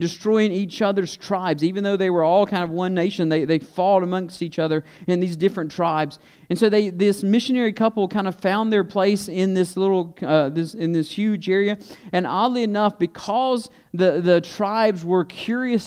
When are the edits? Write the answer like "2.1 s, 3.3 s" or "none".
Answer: none